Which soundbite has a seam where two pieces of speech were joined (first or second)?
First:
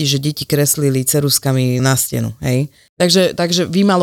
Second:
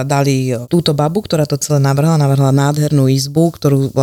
first